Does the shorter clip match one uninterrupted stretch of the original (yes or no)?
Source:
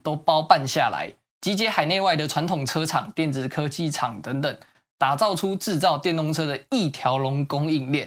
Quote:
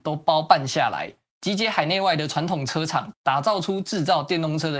no